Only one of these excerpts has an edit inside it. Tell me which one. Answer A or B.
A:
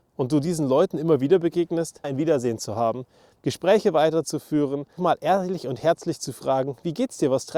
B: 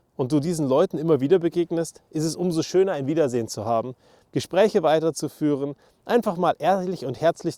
A